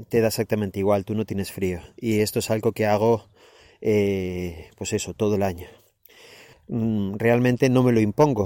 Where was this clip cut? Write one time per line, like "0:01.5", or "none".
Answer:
0:06.5